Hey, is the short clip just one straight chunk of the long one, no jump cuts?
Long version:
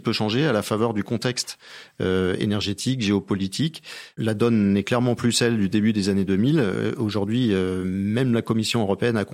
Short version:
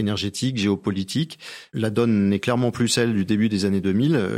yes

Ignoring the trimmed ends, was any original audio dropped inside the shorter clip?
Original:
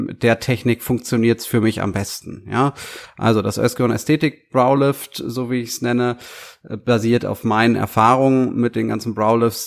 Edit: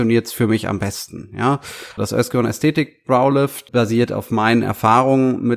yes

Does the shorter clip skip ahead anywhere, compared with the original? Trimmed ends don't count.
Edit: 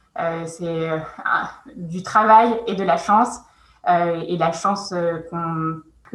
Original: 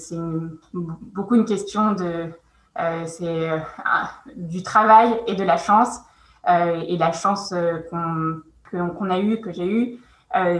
no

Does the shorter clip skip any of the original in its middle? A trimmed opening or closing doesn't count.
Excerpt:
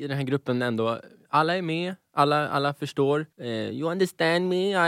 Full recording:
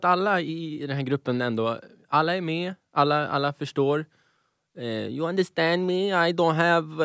yes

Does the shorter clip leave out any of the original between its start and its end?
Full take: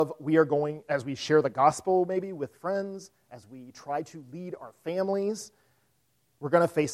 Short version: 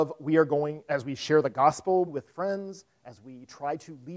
yes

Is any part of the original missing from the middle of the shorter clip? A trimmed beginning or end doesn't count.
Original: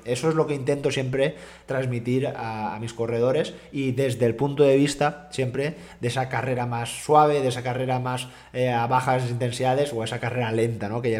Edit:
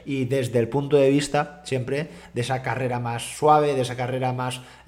no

